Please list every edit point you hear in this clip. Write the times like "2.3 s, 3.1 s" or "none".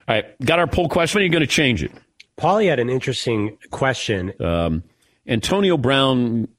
1.1 s, 4.4 s